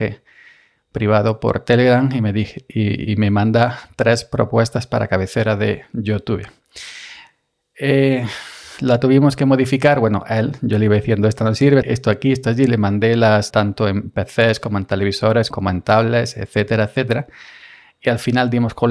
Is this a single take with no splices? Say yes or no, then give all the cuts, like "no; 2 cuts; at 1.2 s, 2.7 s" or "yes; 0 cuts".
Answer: no; 3 cuts; at 11.8 s, 13.5 s, 15.5 s